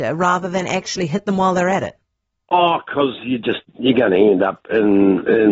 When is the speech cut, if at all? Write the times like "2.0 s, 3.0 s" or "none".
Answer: none